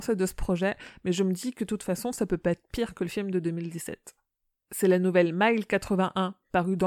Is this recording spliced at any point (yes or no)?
yes